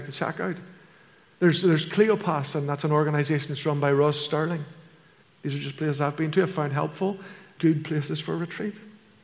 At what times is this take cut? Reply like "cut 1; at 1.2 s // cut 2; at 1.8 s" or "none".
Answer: cut 1; at 5.2 s // cut 2; at 7.6 s